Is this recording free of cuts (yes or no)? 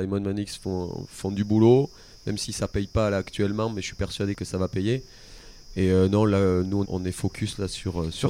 no